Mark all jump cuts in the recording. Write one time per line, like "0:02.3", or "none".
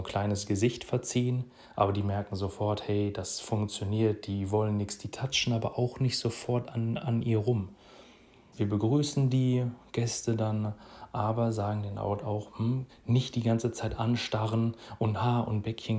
0:08.5
0:12.9